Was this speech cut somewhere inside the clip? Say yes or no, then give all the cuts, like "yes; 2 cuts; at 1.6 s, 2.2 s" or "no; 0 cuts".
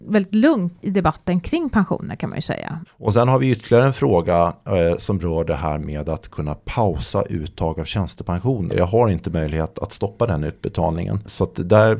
yes; 3 cuts; at 2.8 s, 8.7 s, 9.7 s